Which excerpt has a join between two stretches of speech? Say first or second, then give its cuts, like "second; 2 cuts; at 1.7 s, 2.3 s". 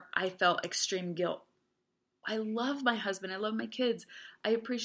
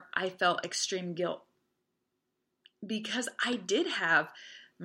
first; 1 cut; at 2.2 s